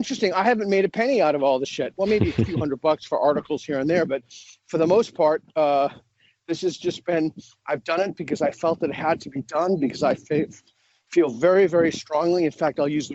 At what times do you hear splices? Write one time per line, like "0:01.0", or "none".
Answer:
none